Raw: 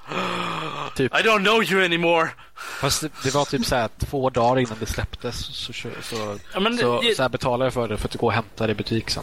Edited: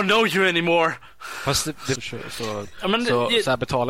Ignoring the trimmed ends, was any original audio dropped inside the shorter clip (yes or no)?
yes